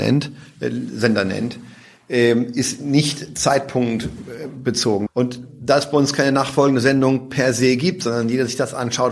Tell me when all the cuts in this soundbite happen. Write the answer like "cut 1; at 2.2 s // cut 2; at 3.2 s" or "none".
cut 1; at 5.1 s